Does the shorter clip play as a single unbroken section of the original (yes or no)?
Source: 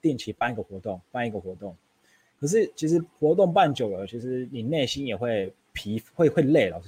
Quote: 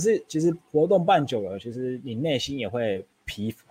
yes